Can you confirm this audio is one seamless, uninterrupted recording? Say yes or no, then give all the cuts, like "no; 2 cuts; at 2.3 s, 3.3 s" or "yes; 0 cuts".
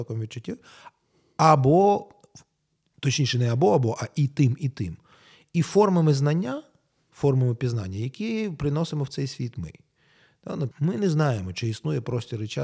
no; 1 cut; at 10.7 s